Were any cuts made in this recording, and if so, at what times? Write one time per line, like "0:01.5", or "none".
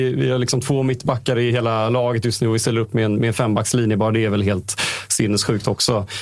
0:01.5

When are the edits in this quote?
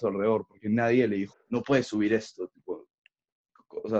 0:01.3

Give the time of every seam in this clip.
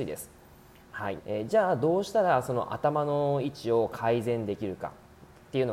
0:01.2

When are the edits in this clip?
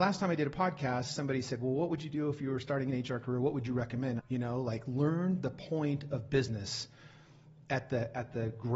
0:04.2

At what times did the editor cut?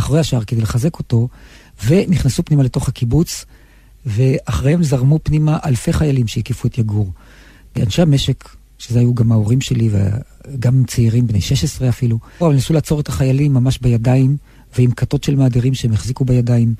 0:12.4

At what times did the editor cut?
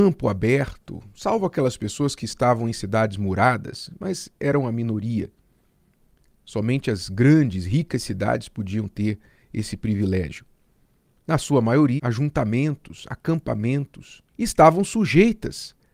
0:12.0
0:14.3

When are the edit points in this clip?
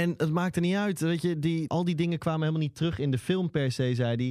0:01.7

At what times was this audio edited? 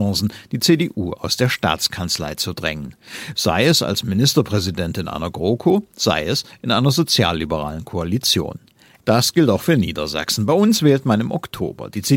0:09.0

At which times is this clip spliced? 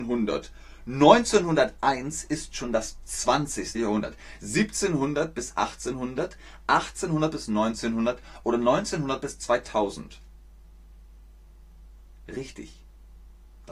0:03.7

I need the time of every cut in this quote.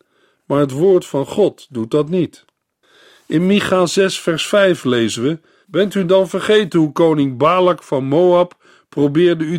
0:05.6

